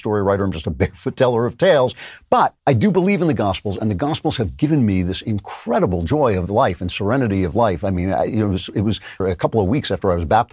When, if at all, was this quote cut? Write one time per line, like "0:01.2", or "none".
0:02.6
0:09.2